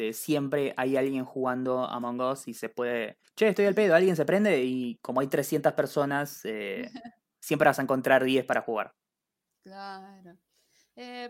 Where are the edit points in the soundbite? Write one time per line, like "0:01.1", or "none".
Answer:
0:03.2